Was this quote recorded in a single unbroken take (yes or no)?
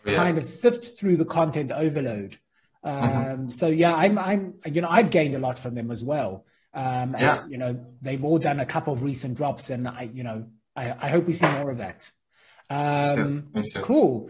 yes